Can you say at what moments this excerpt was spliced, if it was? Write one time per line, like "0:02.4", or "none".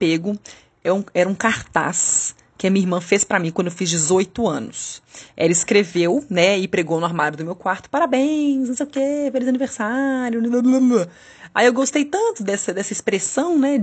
none